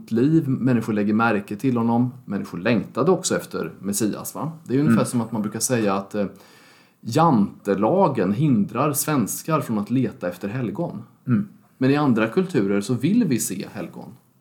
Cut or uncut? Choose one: uncut